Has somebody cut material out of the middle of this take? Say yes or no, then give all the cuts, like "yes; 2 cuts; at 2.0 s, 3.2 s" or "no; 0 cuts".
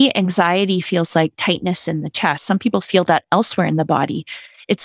no; 0 cuts